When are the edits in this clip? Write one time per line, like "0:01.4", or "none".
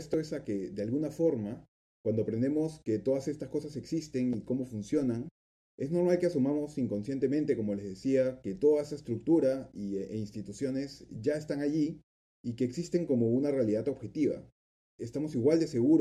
none